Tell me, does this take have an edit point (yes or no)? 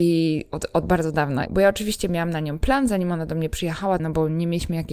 yes